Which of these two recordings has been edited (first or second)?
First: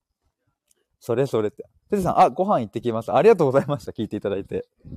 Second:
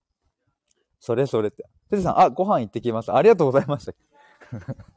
second